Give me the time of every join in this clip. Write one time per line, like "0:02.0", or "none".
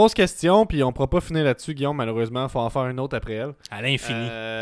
none